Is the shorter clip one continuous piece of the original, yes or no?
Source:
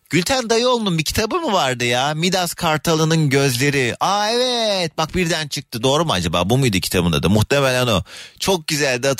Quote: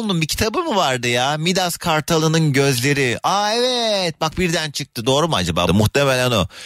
no